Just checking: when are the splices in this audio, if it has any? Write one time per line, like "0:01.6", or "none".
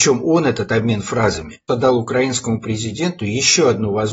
0:01.7